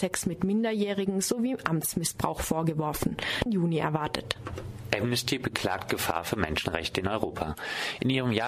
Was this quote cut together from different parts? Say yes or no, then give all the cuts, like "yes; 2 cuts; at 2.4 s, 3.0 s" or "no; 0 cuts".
yes; 1 cut; at 3.5 s